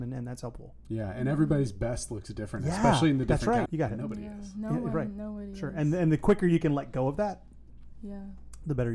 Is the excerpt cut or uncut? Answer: cut